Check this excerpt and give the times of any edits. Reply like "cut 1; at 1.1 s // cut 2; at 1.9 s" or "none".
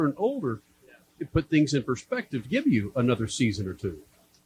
cut 1; at 1.1 s // cut 2; at 2.4 s